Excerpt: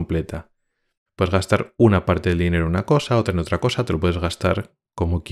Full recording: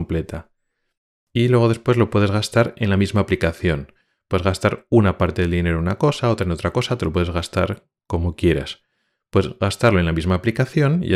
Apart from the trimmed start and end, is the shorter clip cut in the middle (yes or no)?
yes